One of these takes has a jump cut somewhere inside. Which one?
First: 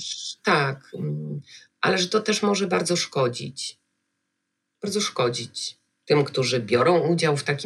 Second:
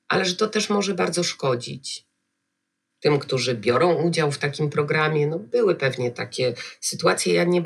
second; 1 cut; at 2.9 s

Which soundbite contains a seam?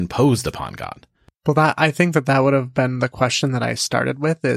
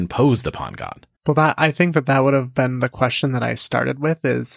second; 1 cut; at 1.1 s

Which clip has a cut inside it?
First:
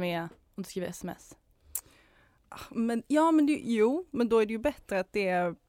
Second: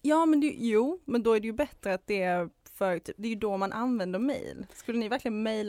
second; 1 cut; at 3.2 s

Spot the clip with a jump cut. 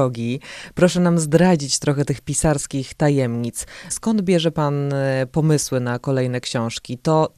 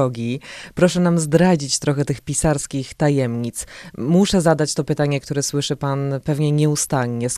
first; 1 cut; at 3.9 s

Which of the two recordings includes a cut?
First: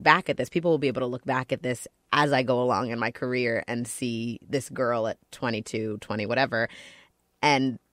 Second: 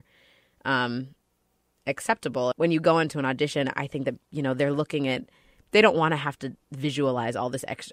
second; 1 cut; at 2.5 s

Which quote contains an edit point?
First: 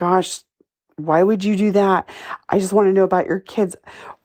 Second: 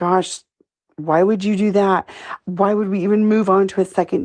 second; 1 cut; at 2.4 s

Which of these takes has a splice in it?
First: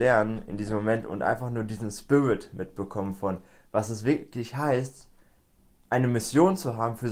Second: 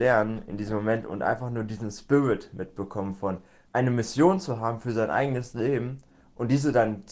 second; 1 cut; at 3.7 s

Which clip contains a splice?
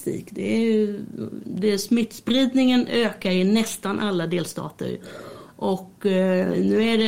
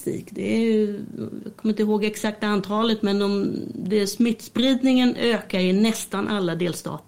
first; 1 cut; at 1.4 s

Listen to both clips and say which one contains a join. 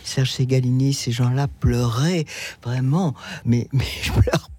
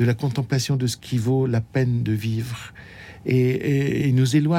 first; 1 cut; at 3.4 s

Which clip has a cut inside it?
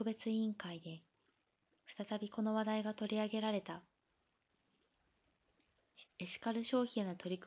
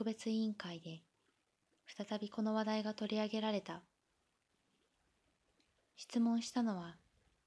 first; 1 cut; at 6.1 s

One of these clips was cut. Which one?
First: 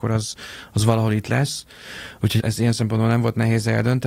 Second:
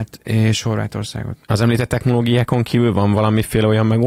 first; 1 cut; at 2.4 s

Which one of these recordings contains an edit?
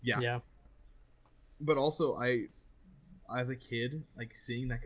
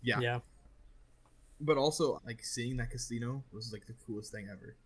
second; 1 cut; at 2.1 s

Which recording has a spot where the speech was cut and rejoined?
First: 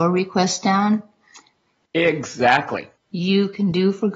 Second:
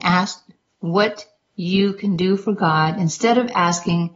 first; 2 cuts; at 1.9 s, 3.0 s

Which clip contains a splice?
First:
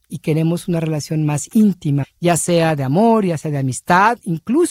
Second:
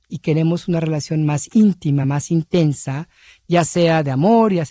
first; 1 cut; at 2.0 s

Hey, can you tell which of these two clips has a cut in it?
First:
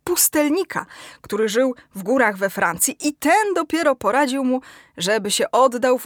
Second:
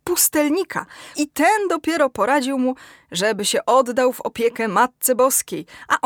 second; 1 cut; at 1.1 s

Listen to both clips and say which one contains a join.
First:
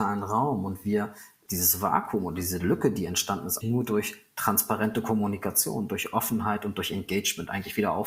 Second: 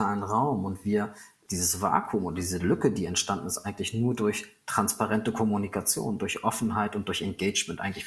first; 1 cut; at 3.6 s

